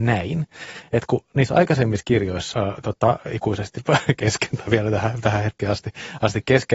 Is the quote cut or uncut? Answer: cut